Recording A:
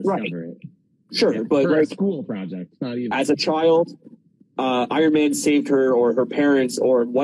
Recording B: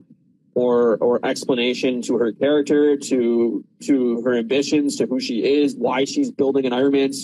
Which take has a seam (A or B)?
A